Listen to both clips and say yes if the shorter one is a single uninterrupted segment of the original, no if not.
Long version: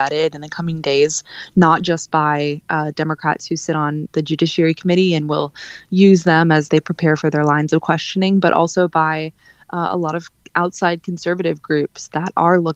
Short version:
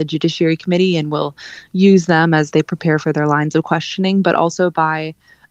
yes